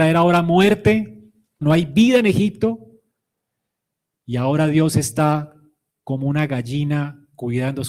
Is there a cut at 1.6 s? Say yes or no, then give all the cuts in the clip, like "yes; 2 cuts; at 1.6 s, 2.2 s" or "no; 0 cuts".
yes; 1 cut; at 1.6 s